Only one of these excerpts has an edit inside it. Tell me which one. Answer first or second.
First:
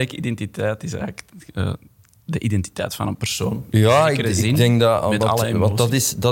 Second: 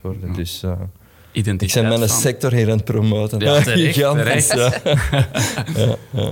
second